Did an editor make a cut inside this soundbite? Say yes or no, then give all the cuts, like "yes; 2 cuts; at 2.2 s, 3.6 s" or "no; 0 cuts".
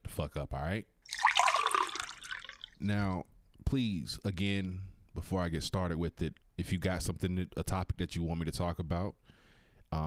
yes; 1 cut; at 6.4 s